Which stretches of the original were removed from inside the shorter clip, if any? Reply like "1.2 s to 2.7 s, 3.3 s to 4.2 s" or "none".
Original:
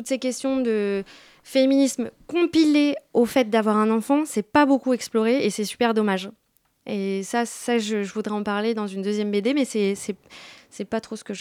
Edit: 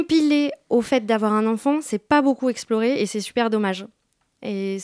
none